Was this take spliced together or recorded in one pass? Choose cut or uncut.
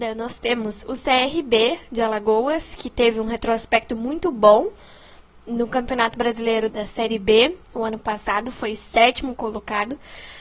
cut